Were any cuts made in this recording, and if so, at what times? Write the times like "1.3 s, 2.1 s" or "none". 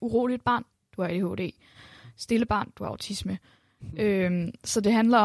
none